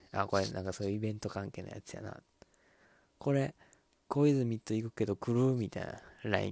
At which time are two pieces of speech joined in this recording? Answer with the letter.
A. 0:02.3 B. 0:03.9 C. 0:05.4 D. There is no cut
B